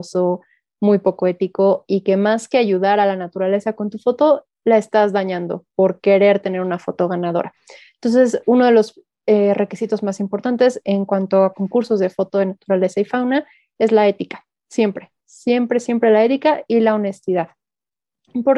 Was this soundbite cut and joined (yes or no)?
no